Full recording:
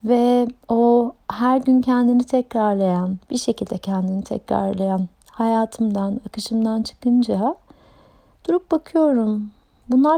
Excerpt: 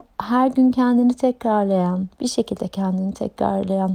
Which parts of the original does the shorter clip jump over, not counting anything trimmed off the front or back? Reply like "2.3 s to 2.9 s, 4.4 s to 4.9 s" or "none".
none